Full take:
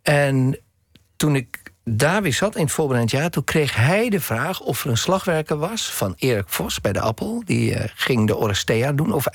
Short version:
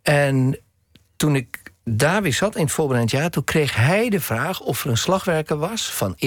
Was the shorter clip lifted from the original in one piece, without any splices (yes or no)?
yes